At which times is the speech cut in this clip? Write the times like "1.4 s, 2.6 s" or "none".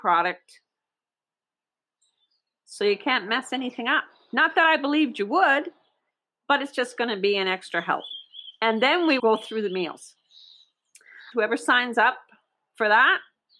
9.2 s, 11.3 s